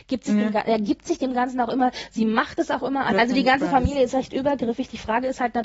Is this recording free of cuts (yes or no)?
no